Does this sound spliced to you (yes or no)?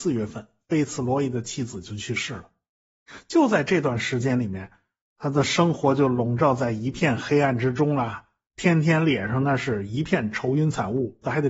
no